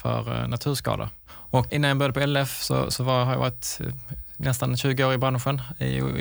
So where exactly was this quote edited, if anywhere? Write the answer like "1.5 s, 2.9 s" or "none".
1.7 s